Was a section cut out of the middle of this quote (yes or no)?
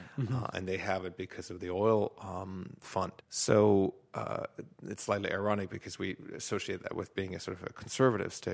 yes